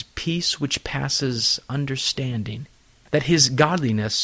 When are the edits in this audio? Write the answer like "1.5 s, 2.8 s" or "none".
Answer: 3.1 s